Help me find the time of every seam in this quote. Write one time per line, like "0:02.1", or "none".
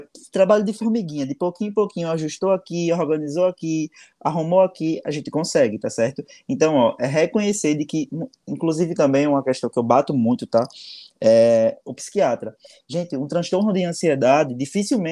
none